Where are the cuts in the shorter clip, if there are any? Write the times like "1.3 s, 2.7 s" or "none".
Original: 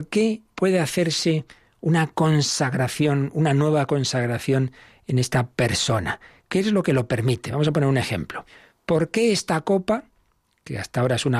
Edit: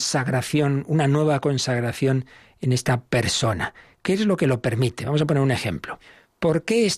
none